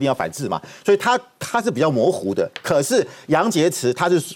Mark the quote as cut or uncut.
uncut